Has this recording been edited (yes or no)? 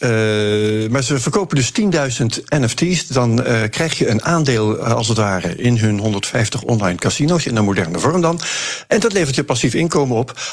no